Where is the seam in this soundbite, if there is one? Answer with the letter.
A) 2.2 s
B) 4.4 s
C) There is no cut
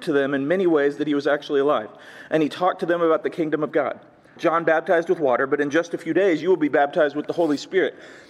B